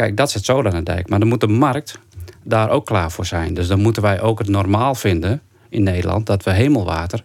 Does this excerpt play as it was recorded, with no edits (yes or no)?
yes